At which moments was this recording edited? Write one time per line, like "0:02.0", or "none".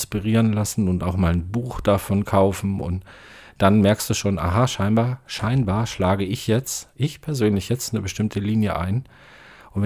none

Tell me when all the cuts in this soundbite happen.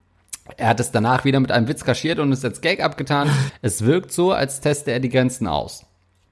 0:03.5

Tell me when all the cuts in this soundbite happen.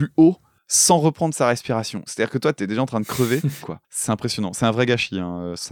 0:02.1
0:03.6

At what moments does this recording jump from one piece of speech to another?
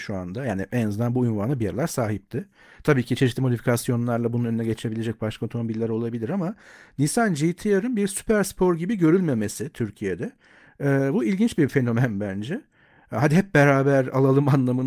none

